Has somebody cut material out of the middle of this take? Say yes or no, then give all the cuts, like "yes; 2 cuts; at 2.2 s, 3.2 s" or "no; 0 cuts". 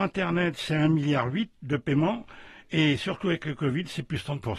no; 0 cuts